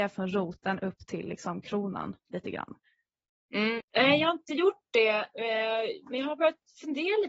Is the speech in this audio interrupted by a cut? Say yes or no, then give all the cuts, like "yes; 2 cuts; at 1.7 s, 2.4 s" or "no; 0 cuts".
yes; 1 cut; at 3.8 s